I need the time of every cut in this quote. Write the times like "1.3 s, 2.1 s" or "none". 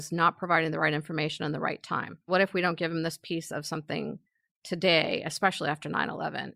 2.2 s